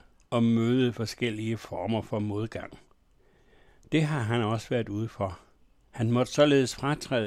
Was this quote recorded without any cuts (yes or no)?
yes